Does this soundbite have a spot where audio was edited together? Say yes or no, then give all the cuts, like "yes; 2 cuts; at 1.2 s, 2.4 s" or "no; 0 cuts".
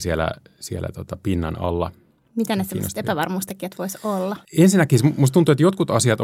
no; 0 cuts